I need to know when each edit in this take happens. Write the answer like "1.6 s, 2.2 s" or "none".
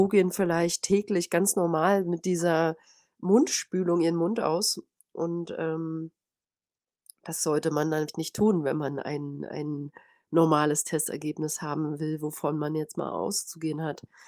none